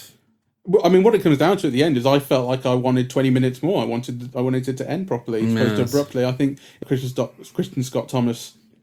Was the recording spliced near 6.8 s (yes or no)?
yes